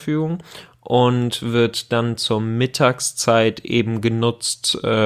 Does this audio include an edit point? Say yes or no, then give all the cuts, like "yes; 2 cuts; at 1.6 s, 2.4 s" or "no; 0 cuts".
no; 0 cuts